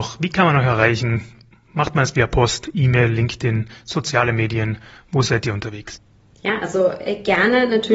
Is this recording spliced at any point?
no; 0 cuts

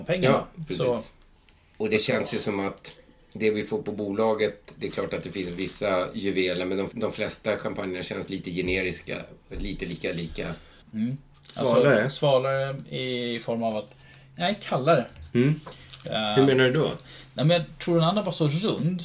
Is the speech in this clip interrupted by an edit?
yes; 2 cuts; at 6.9 s, 10.8 s

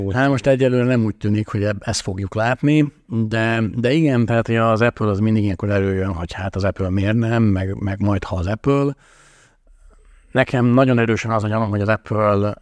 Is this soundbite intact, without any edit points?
yes; 0 cuts

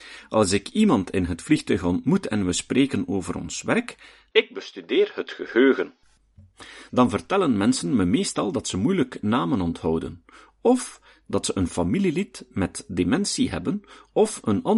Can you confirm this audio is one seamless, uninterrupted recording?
no; 1 cut; at 4.3 s

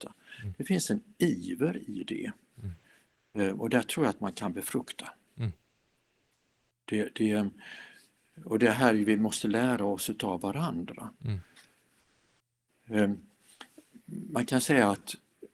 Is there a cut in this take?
no; 0 cuts

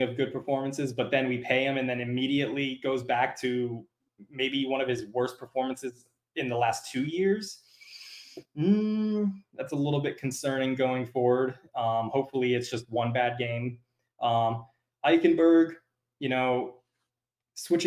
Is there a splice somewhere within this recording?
no; 0 cuts

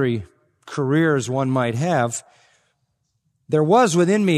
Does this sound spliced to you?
no; 0 cuts

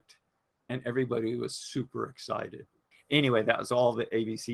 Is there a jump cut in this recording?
yes; 1 cut; at 2.9 s

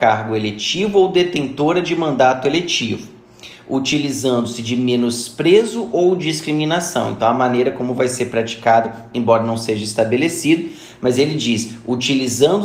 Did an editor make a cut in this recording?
no; 0 cuts

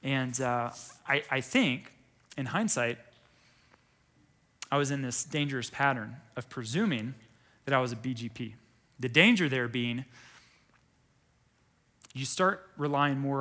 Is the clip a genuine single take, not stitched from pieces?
yes; 0 cuts

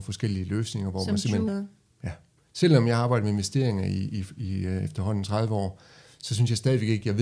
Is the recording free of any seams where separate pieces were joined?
no; 1 cut; at 1.5 s

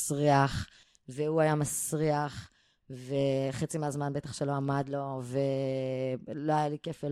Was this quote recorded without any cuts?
yes; 0 cuts

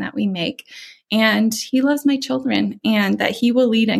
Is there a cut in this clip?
no; 0 cuts

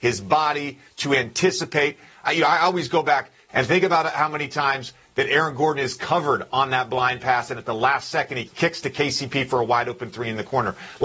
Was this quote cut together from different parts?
yes; 2 cuts; at 3.5 s, 8.5 s

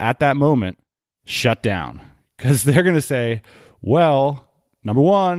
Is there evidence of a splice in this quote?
no; 0 cuts

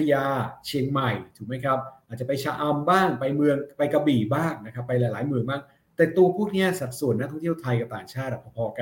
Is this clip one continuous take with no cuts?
yes; 0 cuts

